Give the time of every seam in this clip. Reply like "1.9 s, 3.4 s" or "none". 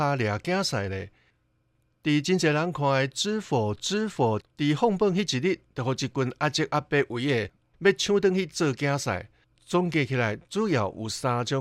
4.4 s, 9.5 s